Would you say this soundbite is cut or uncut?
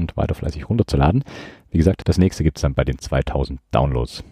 uncut